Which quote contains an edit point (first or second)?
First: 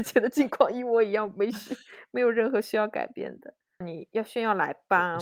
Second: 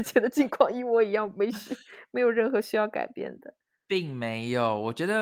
first